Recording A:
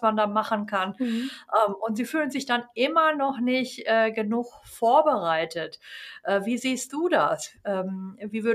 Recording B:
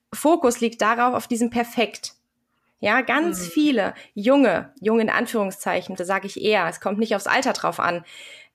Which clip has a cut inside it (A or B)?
B